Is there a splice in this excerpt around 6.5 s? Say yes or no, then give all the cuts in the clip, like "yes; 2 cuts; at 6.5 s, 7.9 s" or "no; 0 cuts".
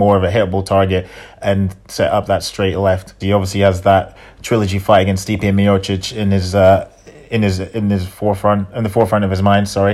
no; 1 cut; at 3.2 s